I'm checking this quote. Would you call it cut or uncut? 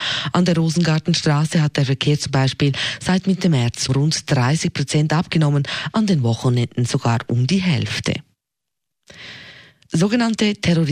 cut